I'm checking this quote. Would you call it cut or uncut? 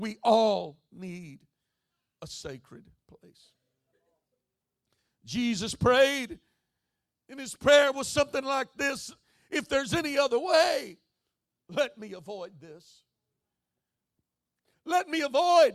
uncut